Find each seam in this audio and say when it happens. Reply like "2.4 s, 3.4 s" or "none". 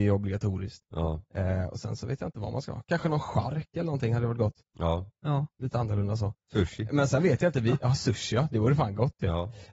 none